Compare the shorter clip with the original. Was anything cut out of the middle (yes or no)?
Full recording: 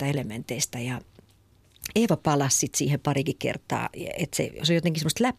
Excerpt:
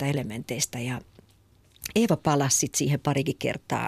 no